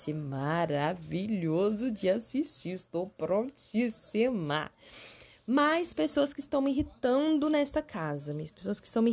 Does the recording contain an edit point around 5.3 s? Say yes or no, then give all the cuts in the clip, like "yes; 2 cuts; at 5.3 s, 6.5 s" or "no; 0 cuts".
no; 0 cuts